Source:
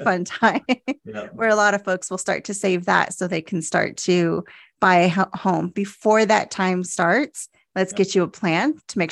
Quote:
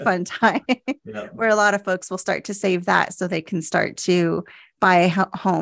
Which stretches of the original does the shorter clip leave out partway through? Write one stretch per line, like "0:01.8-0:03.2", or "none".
none